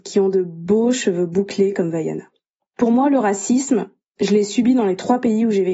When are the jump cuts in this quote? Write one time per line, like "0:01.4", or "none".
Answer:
none